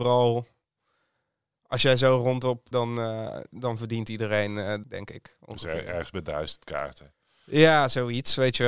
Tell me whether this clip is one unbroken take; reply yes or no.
no